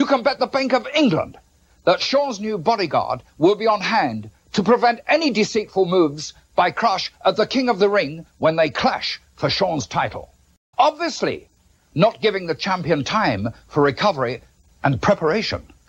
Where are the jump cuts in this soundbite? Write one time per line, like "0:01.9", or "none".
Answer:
0:10.7